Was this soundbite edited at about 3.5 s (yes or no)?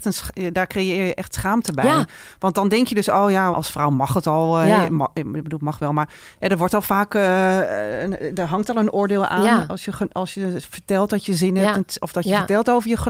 yes